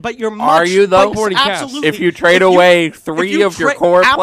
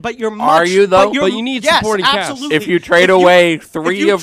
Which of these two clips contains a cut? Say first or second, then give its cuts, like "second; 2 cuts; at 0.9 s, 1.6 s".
first; 1 cut; at 1.1 s